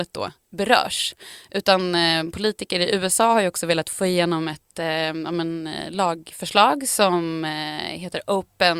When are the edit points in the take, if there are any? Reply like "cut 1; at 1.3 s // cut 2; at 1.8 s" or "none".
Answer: none